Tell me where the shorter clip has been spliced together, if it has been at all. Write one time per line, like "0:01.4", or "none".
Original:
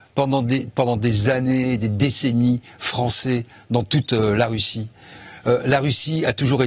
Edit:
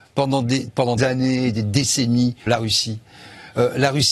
0:01.0
0:02.5